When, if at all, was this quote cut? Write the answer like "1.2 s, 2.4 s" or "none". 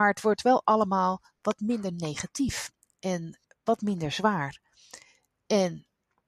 none